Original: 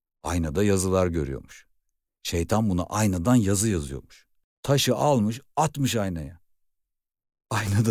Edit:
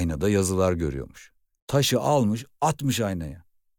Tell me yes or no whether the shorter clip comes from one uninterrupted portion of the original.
no